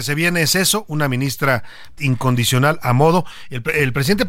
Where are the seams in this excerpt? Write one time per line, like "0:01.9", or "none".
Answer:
0:02.0